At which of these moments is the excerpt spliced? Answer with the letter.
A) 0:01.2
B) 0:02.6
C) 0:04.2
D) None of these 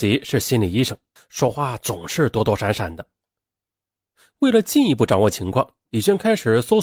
A